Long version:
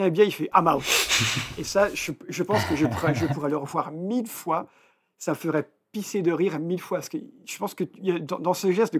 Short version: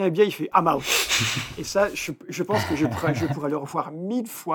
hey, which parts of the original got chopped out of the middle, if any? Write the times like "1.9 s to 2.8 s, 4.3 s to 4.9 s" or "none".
none